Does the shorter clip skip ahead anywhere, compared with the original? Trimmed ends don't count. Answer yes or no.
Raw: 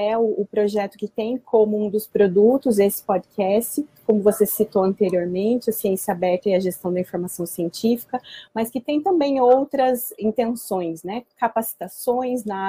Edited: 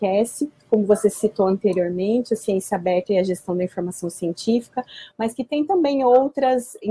no